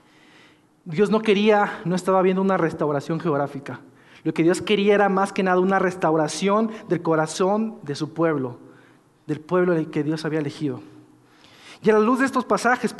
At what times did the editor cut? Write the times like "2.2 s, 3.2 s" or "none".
none